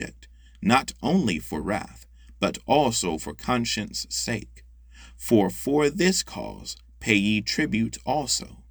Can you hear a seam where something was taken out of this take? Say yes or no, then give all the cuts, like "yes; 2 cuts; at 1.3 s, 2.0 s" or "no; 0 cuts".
no; 0 cuts